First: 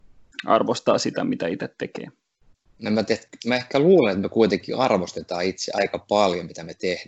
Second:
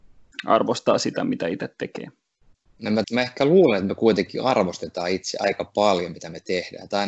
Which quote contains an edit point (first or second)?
second